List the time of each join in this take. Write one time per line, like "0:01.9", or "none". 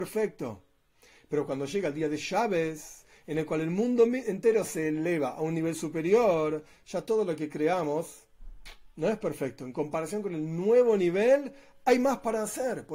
none